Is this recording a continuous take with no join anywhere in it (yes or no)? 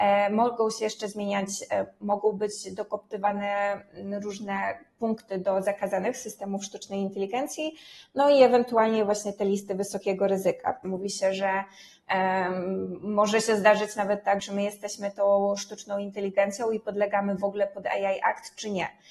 no